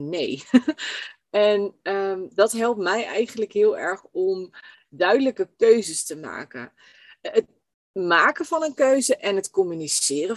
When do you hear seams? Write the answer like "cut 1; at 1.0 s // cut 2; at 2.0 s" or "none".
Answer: none

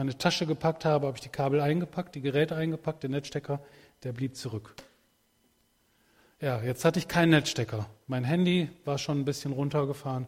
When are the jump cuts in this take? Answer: none

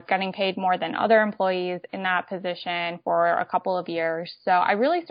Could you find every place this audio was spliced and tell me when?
none

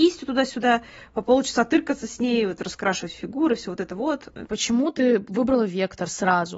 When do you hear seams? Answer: cut 1; at 4.5 s

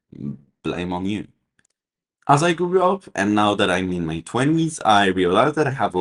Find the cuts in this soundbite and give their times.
none

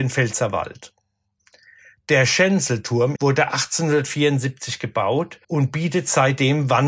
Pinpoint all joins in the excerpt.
cut 1; at 3.2 s // cut 2; at 5.4 s

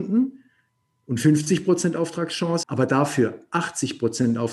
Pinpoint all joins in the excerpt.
cut 1; at 2.6 s

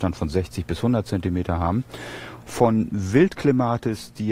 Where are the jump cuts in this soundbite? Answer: cut 1; at 2.4 s

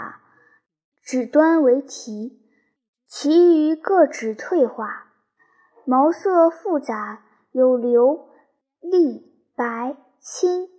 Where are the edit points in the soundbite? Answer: none

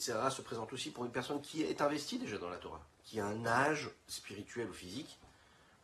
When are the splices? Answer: cut 1; at 2.9 s // cut 2; at 4.0 s

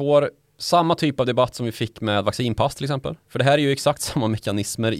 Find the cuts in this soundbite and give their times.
none

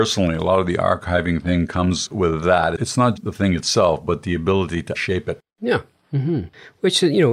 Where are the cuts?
cut 1; at 3.2 s // cut 2; at 4.9 s

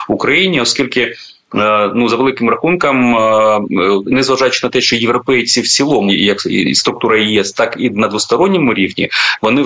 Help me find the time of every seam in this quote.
cut 1; at 6.1 s

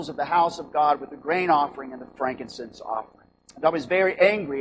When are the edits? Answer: cut 1; at 3.5 s

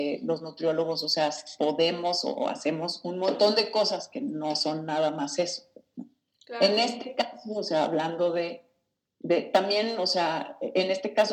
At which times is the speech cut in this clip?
none

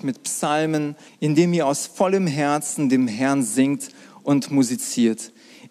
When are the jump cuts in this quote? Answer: cut 1; at 1.1 s

